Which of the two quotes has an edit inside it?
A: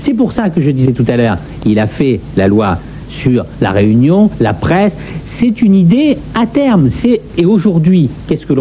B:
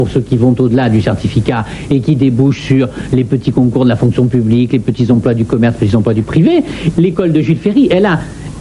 B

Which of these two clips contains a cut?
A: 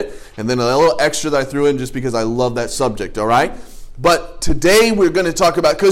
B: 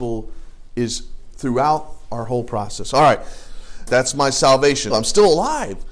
B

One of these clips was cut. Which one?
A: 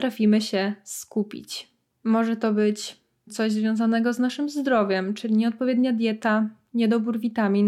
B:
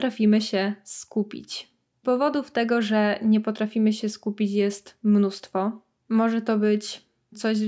A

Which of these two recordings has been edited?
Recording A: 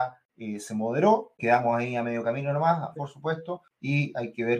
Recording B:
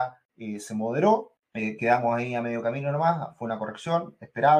A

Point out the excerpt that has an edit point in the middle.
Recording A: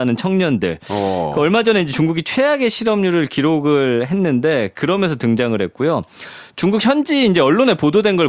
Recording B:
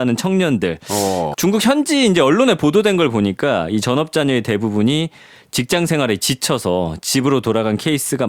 B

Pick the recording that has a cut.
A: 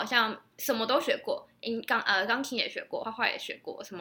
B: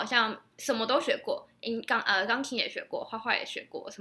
A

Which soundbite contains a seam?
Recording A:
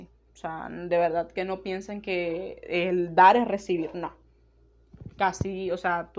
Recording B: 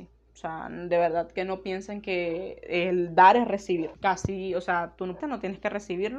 B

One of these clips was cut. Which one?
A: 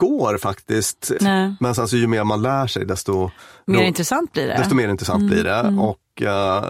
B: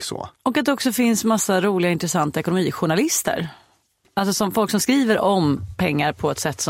A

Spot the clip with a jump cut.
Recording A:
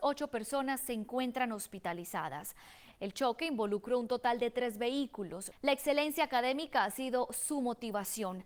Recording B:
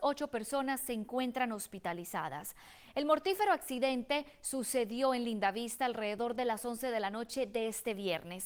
A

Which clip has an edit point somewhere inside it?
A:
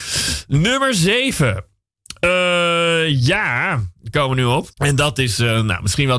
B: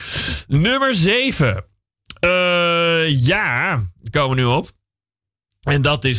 A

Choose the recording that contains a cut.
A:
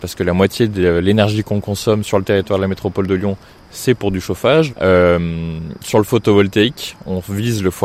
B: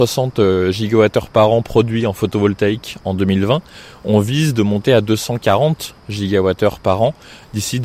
A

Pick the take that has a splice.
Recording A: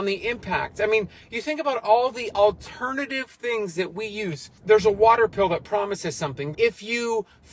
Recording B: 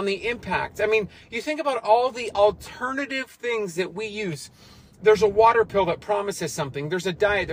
A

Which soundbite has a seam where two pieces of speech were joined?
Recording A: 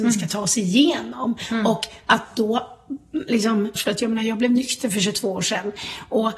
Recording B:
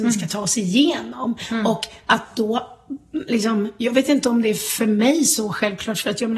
A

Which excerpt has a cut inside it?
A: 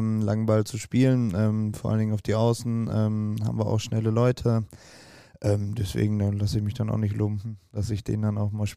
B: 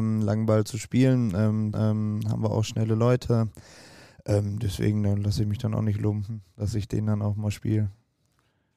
B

